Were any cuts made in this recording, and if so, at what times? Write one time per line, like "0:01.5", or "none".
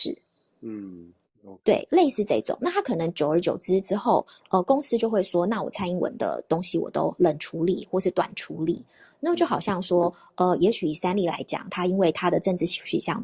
none